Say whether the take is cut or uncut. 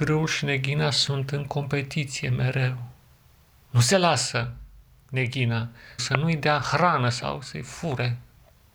cut